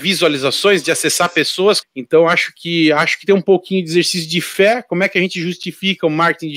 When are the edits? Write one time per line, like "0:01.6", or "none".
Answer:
0:01.8